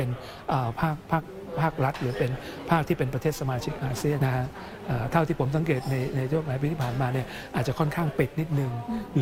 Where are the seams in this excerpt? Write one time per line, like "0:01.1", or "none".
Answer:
0:04.2